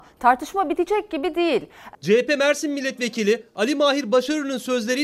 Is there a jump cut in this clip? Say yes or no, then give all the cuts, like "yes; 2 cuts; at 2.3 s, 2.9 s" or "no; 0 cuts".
yes; 1 cut; at 1.9 s